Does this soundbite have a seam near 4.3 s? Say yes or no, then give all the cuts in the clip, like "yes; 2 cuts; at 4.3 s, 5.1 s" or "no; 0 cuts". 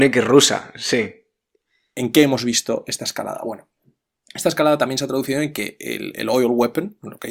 no; 1 cut; at 1.9 s